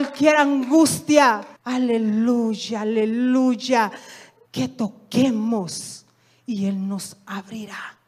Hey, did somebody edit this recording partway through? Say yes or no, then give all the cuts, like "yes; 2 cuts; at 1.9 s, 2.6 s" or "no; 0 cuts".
yes; 2 cuts; at 1.6 s, 4.5 s